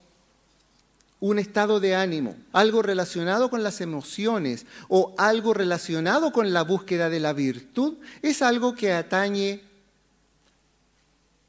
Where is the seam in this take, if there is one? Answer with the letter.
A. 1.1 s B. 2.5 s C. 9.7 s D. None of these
B